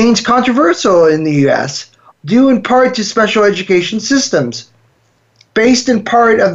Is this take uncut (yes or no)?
no